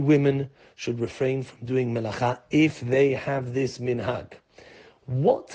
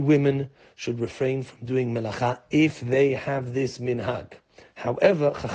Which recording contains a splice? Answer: second; 1 cut; at 4.6 s

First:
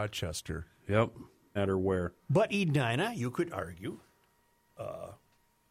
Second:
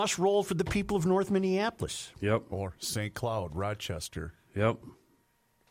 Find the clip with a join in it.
first; 1 cut; at 1.6 s

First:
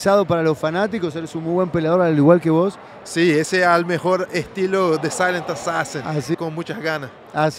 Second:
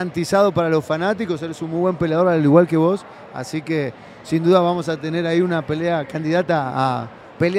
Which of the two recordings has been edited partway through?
first; 2 cuts; at 3.0 s, 6.3 s

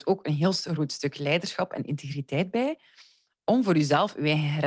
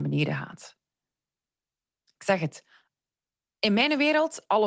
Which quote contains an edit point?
second; 1 cut; at 2.0 s

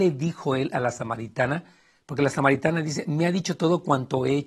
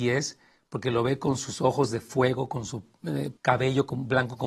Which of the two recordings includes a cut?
second; 1 cut; at 3.4 s

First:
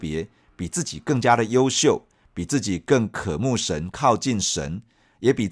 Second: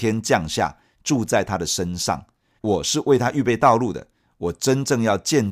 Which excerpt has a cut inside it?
second; 1 cut; at 2.6 s

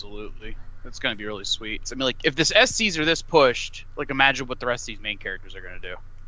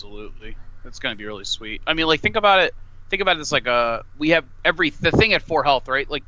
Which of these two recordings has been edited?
first; 1 cut; at 1.8 s

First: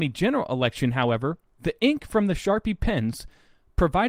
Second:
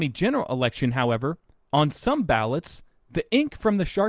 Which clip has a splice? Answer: first; 1 cut; at 1.5 s

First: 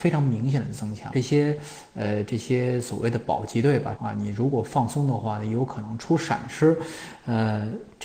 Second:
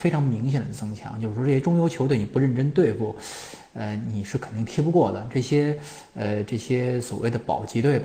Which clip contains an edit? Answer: first; 2 cuts; at 1.1 s, 4.0 s

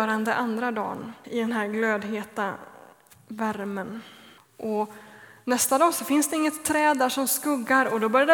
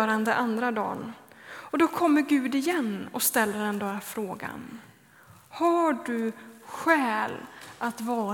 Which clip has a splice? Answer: first; 2 cuts; at 1.2 s, 4.4 s

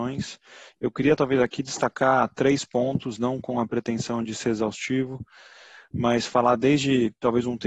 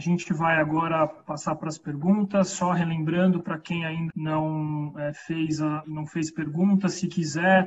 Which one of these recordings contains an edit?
second; 2 cuts; at 4.1 s, 5.8 s

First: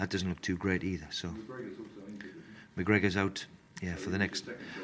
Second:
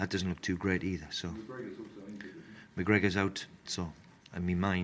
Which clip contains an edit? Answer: second; 1 cut; at 3.7 s

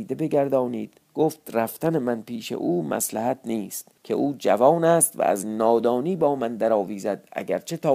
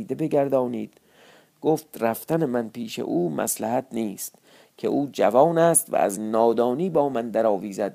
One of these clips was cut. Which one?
first; 2 cuts; at 1.0 s, 4.0 s

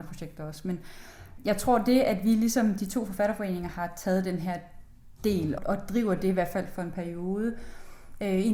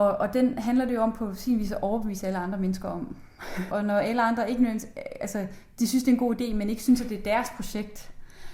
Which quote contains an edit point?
second; 1 cut; at 3.7 s

